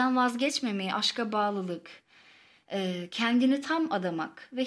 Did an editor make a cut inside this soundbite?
no; 0 cuts

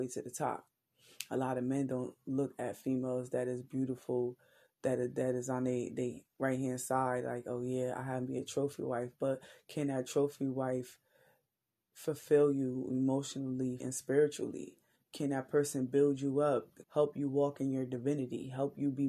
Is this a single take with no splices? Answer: no; 2 cuts; at 13.8 s, 16.8 s

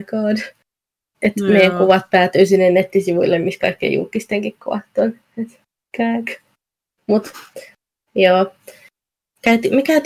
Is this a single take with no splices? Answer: yes; 0 cuts

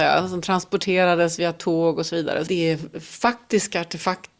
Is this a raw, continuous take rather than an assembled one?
no; 1 cut; at 2.5 s

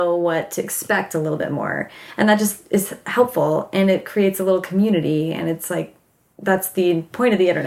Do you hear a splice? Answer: no; 0 cuts

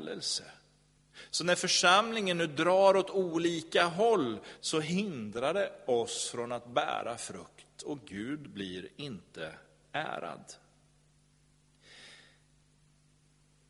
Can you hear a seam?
yes; 1 cut; at 4.6 s

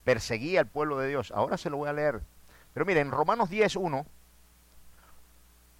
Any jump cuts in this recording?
no; 0 cuts

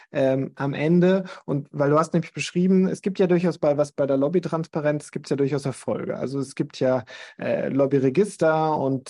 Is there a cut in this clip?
no; 0 cuts

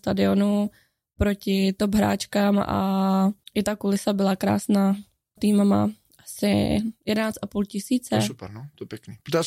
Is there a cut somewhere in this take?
yes; 1 cut; at 5.4 s

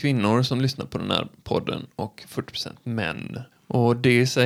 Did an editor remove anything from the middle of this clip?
yes; 1 cut; at 3.5 s

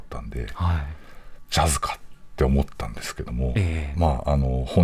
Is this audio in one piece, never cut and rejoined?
yes; 0 cuts

